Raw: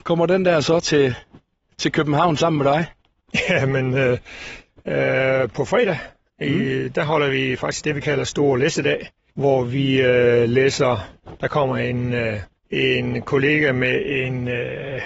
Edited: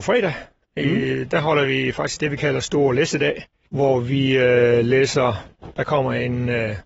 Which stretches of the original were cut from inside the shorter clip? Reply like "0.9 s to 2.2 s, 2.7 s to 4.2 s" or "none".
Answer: none